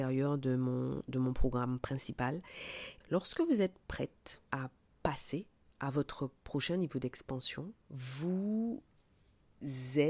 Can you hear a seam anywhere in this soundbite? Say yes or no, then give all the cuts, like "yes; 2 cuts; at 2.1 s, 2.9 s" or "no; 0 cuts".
yes; 3 cuts; at 3.0 s, 4.5 s, 7.8 s